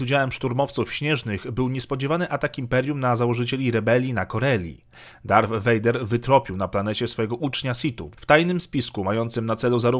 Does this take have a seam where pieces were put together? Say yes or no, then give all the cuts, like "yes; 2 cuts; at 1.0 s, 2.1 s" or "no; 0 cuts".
yes; 1 cut; at 8.1 s